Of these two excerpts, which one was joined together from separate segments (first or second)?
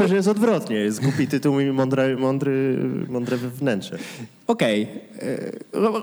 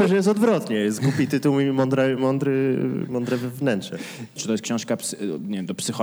second